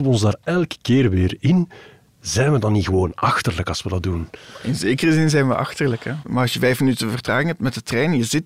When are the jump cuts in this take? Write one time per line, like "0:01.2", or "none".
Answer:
0:06.2